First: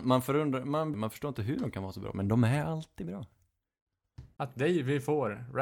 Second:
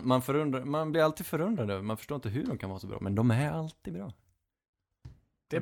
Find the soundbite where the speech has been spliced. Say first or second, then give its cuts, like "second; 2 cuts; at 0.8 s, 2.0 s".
first; 2 cuts; at 0.9 s, 4.4 s